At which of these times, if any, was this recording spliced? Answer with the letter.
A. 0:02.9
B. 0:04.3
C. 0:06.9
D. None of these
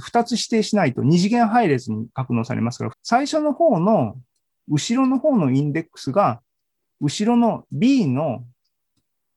A